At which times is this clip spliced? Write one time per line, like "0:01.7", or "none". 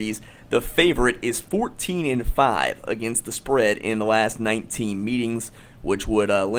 none